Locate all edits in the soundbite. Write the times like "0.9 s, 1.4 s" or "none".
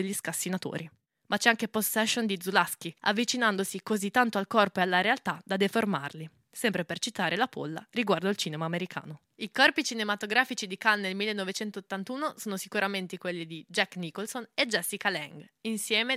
3.0 s